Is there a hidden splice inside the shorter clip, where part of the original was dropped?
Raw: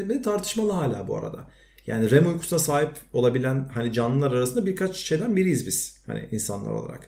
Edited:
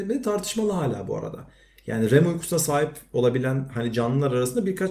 no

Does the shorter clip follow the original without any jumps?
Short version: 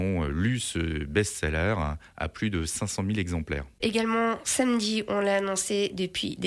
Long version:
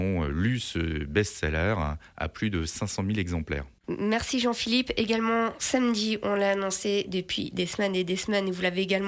no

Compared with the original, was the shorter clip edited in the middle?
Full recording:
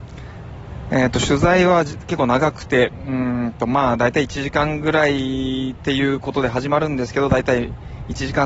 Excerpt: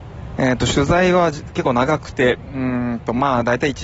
no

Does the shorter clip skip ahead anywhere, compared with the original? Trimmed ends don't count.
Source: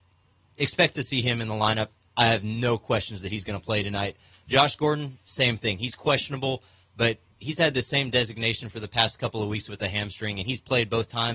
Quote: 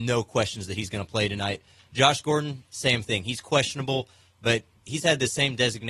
no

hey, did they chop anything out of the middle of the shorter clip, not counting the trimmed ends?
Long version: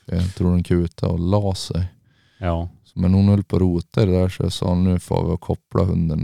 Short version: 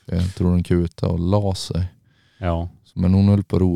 no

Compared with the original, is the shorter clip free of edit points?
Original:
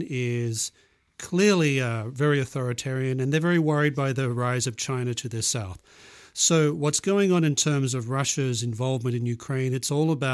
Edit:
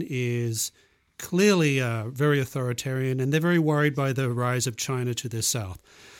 yes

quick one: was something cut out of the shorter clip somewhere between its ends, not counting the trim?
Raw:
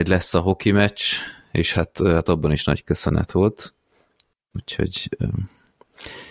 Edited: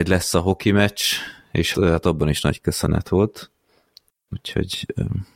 yes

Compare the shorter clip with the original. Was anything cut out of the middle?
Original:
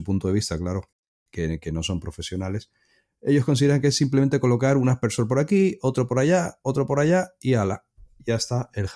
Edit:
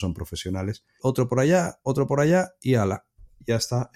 yes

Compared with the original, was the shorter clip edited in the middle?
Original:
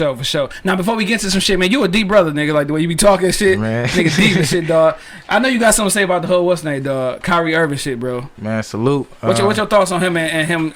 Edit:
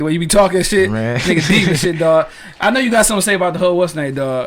no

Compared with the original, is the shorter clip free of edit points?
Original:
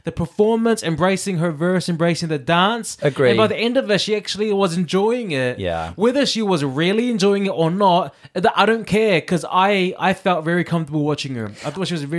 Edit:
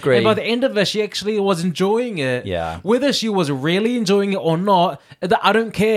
yes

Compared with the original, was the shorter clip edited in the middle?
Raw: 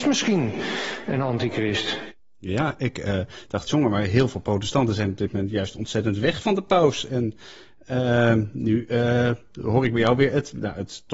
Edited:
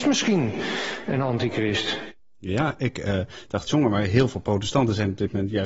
no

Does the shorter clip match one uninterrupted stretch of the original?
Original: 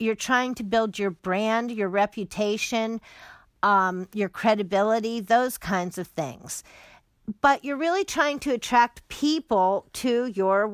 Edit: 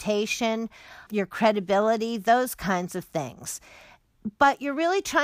no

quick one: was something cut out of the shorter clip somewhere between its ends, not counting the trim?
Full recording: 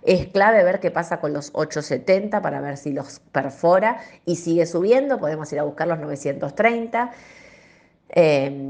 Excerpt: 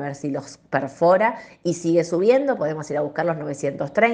no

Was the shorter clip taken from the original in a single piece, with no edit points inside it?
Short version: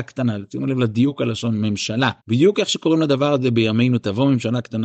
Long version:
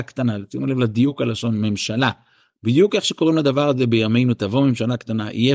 no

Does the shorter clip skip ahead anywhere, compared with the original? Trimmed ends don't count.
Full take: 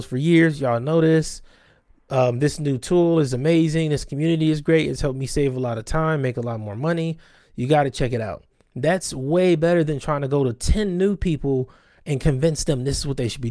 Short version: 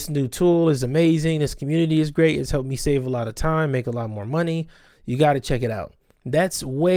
no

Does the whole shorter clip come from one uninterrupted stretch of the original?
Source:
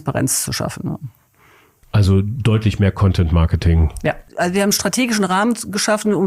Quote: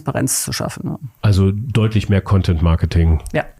no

